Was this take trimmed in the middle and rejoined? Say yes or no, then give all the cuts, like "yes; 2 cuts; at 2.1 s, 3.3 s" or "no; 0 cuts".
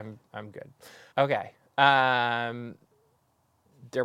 yes; 1 cut; at 1.1 s